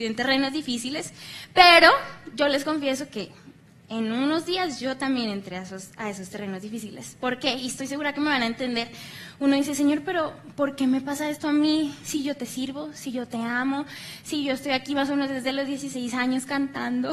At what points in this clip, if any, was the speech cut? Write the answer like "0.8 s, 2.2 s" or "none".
none